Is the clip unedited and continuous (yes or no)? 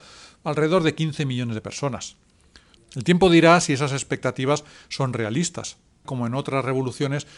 no